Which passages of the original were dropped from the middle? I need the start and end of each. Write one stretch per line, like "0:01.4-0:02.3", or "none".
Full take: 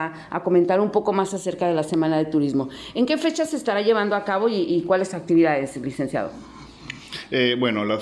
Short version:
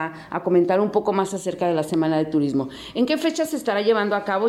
none